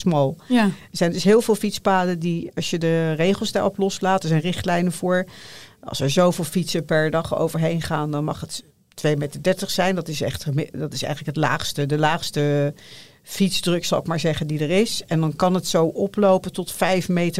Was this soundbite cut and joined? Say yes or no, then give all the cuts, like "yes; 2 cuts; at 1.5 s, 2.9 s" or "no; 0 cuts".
no; 0 cuts